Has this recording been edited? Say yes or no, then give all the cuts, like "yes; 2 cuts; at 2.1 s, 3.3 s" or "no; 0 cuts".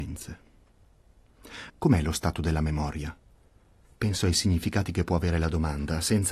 yes; 1 cut; at 1.7 s